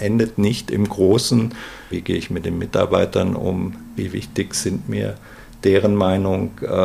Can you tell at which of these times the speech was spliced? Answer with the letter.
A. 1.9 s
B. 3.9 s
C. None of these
A